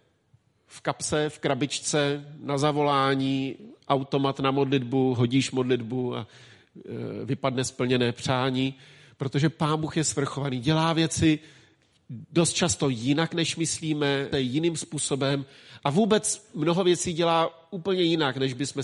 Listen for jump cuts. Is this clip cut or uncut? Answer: cut